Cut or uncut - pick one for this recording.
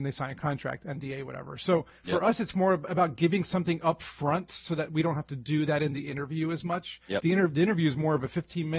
uncut